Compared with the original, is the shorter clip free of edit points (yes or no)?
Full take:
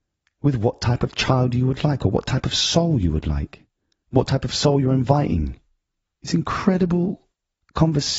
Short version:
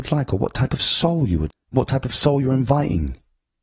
no